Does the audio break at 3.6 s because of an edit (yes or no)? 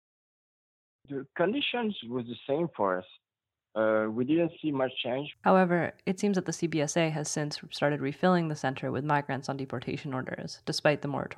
no